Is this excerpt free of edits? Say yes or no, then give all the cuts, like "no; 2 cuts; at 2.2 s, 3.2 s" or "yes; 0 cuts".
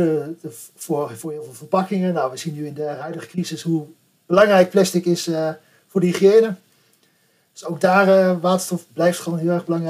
yes; 0 cuts